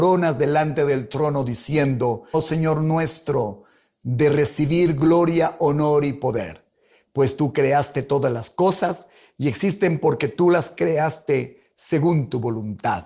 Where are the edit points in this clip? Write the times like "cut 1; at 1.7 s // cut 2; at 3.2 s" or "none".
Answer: cut 1; at 2.3 s